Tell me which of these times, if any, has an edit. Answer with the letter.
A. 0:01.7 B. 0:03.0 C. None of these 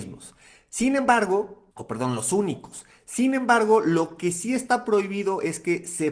A